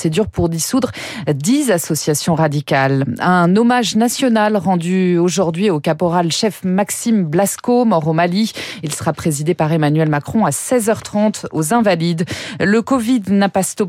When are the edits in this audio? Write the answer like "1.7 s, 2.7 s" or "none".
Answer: none